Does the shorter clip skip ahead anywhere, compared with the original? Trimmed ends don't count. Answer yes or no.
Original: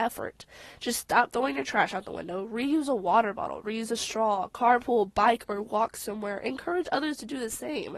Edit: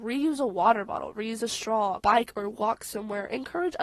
yes